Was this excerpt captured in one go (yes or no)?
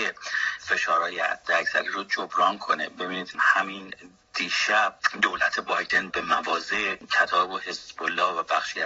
no